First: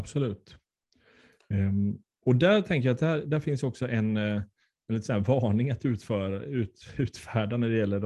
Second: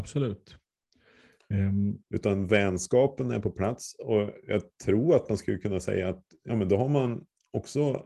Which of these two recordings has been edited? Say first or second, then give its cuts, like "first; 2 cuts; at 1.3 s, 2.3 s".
second; 2 cuts; at 2.0 s, 6.5 s